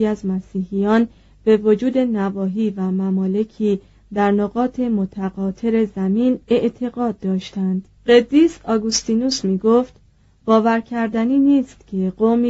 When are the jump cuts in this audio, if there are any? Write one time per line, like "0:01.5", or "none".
0:08.0